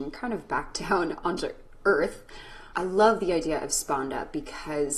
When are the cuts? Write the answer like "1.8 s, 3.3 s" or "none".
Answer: 2.7 s